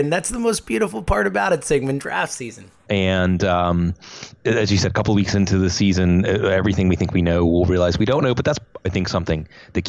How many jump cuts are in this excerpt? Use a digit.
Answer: 2